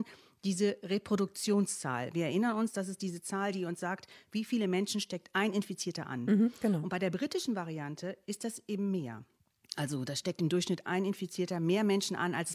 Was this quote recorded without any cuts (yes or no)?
yes